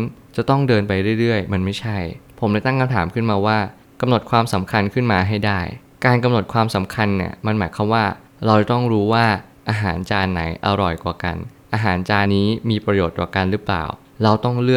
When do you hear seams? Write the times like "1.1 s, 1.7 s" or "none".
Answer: 12.3 s